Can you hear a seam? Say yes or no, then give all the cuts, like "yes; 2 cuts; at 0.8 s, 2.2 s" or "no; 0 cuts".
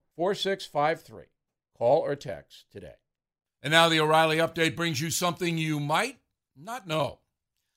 no; 0 cuts